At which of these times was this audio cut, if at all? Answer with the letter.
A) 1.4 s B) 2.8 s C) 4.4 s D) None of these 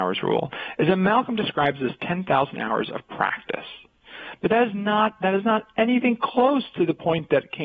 D